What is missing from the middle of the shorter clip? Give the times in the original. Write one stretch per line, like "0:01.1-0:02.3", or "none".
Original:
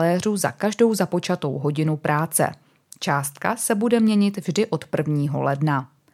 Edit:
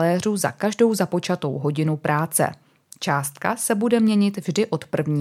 none

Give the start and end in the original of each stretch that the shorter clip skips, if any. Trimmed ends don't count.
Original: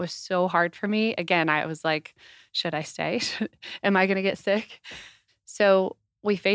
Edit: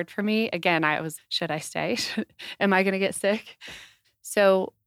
0:01.8-0:02.4

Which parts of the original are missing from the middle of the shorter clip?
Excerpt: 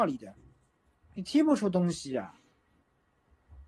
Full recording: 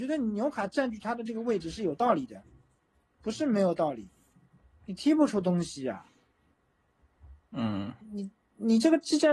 0:03.1-0:04.7

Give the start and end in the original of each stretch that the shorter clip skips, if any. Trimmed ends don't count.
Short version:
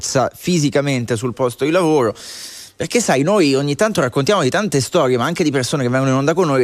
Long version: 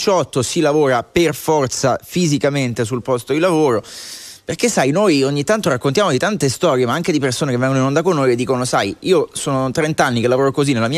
none

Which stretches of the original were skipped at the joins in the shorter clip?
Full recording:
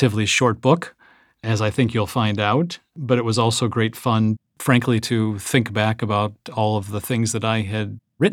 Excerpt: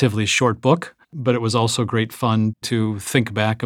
0:01.0-0:02.9
0:04.5-0:05.0

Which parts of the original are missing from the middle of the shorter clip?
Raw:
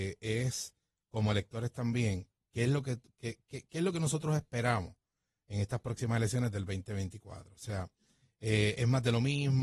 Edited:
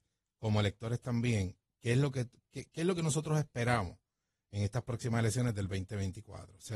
0:03.2-0:03.4

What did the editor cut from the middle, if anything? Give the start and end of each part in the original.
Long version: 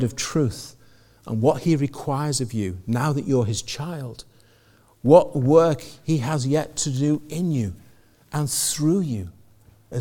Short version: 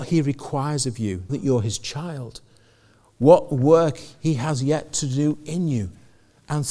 0:02.8-0:03.1

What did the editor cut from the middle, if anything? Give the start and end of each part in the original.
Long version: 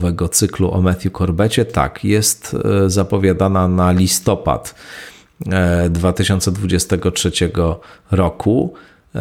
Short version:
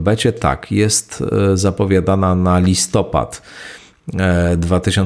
none

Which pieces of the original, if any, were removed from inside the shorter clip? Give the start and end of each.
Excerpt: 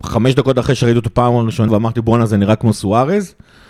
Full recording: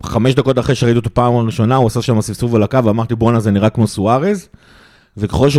0:01.7-0:02.8

